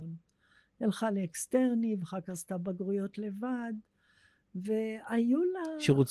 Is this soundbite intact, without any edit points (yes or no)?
yes